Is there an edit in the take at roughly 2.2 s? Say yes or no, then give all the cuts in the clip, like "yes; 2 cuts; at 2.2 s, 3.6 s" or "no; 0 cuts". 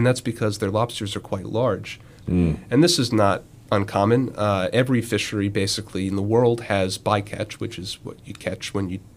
yes; 1 cut; at 2.2 s